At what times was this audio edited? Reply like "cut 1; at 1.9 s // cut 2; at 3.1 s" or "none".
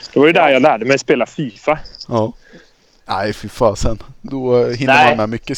cut 1; at 3.0 s